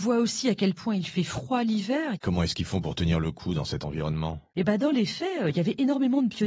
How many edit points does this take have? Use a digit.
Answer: 1